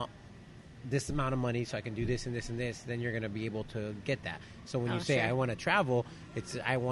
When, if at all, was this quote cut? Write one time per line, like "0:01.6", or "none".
none